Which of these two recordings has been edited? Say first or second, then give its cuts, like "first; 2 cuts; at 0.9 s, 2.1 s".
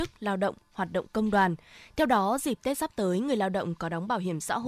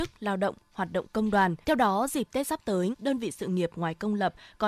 second; 2 cuts; at 1.6 s, 2.9 s